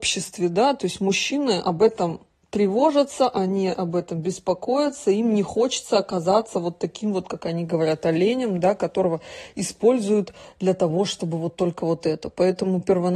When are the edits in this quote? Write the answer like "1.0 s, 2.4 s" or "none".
none